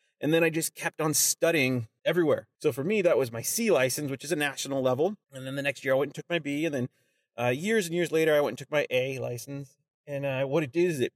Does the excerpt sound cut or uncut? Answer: cut